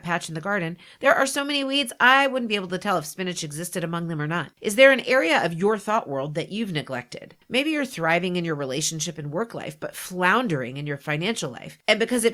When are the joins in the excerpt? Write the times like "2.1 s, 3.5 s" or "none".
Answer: 4.5 s

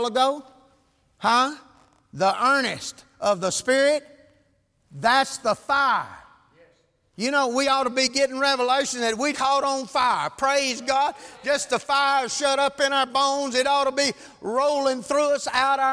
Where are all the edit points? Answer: 9.3 s

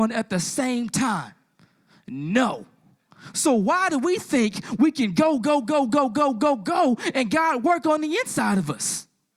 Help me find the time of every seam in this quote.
none

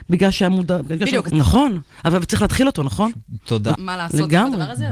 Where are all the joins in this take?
1.3 s, 3.8 s

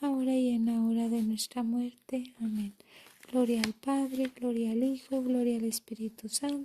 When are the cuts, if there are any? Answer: none

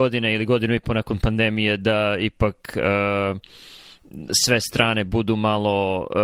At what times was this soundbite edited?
none

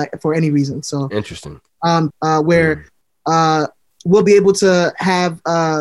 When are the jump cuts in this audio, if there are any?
2.1 s

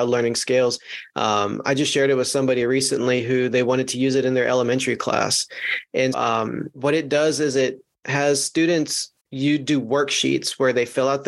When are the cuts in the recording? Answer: 6.1 s, 9.2 s

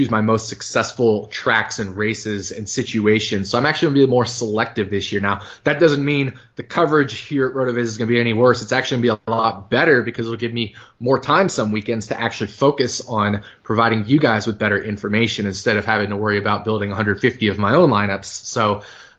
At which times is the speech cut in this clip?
none

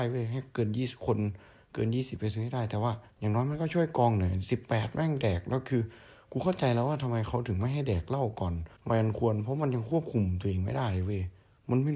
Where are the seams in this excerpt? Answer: 3.1 s, 8.8 s

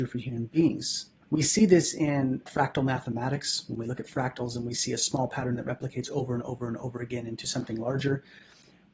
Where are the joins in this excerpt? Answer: 1.2 s, 2.5 s

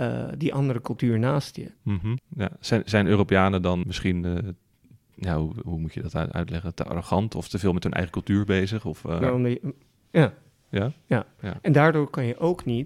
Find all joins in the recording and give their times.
2.2 s, 3.8 s, 9.2 s

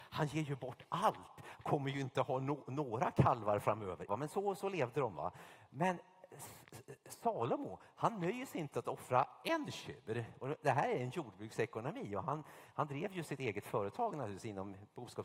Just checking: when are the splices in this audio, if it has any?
4.1 s

